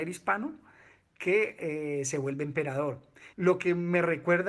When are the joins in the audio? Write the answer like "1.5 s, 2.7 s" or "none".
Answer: 3.3 s